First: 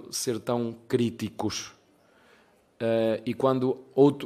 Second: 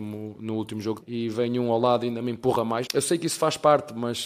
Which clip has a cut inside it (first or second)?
second